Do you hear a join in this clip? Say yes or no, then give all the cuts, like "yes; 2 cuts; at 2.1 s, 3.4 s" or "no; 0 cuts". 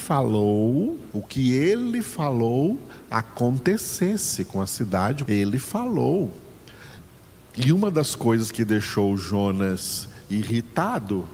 yes; 2 cuts; at 1.1 s, 5.3 s